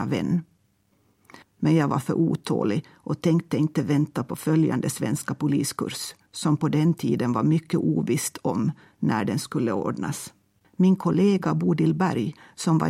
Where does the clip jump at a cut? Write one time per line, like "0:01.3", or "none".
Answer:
0:01.4
0:10.6